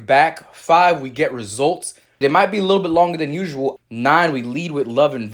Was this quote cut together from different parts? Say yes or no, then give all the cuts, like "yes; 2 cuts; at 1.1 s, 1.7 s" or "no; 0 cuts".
yes; 2 cuts; at 2.2 s, 3.8 s